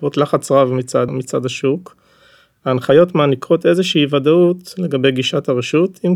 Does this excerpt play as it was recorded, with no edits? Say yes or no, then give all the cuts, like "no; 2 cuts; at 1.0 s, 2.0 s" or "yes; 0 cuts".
no; 1 cut; at 1.1 s